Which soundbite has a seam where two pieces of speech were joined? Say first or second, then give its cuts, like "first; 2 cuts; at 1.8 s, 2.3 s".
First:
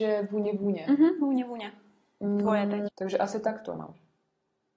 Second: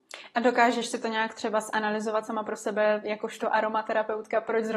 first; 1 cut; at 2.9 s